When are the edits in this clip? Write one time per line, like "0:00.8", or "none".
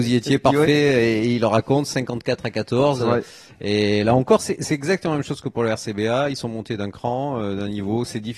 none